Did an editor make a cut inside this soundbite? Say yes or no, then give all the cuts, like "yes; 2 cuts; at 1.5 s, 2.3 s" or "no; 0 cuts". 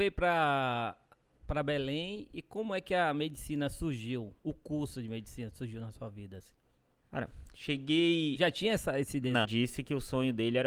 yes; 1 cut; at 9.4 s